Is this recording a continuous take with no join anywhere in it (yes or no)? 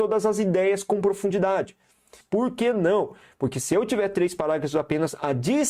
no